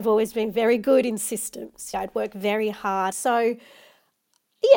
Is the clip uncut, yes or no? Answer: no